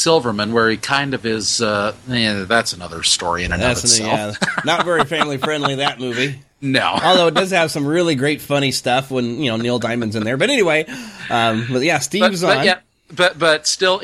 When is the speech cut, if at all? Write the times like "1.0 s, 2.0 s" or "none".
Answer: none